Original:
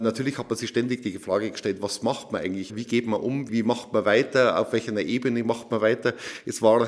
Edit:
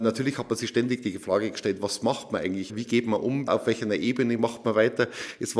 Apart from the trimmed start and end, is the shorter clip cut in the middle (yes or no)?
yes